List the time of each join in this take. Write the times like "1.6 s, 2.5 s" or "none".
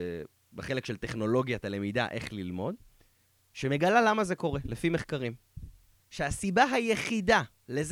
6.0 s